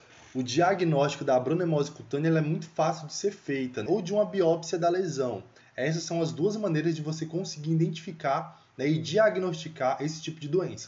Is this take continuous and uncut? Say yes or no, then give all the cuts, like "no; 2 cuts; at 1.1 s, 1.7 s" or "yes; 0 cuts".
no; 1 cut; at 3.9 s